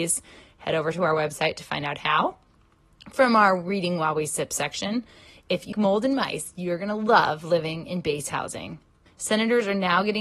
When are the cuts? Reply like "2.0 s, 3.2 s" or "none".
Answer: 5.7 s, 9.1 s